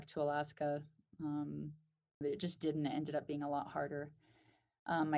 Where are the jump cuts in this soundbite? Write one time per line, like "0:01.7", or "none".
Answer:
0:02.2